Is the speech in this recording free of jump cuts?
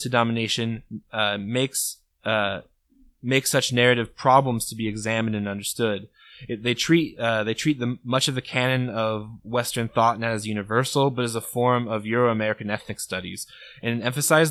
yes; 0 cuts

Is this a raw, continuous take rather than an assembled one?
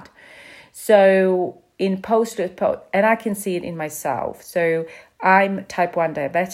yes; 0 cuts

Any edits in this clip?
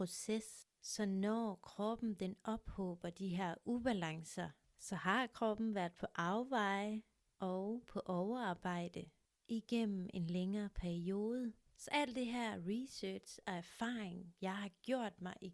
no; 0 cuts

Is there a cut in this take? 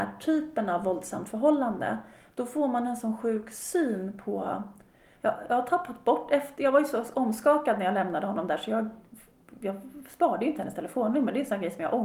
yes; 1 cut; at 5.2 s

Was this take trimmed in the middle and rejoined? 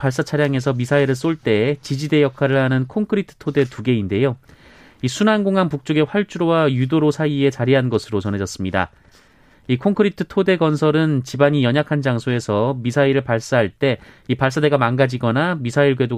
yes; 1 cut; at 9.5 s

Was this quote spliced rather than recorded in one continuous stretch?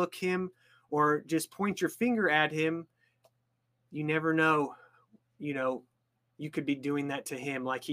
no; 0 cuts

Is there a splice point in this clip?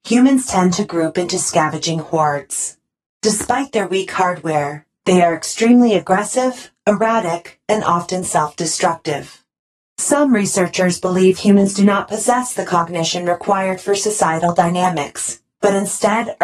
no; 0 cuts

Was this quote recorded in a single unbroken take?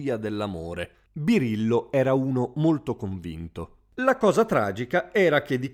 yes; 0 cuts

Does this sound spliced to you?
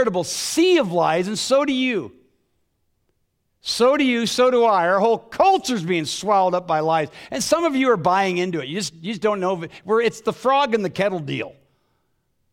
no; 0 cuts

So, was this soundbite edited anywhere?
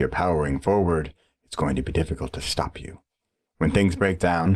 yes; 1 cut; at 3.5 s

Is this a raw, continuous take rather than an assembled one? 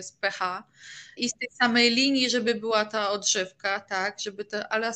no; 1 cut; at 1.2 s

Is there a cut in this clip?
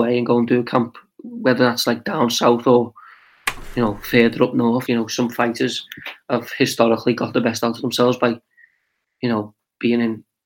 yes; 1 cut; at 4.9 s

